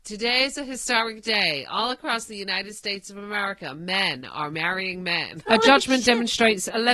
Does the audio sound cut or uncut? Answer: cut